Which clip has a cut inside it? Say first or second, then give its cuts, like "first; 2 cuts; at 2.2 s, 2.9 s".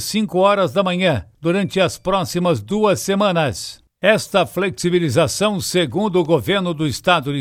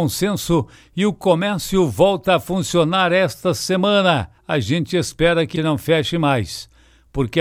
second; 2 cuts; at 4.4 s, 5.6 s